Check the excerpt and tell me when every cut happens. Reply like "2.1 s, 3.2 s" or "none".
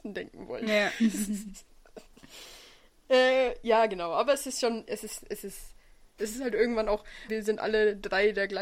6.2 s, 7.3 s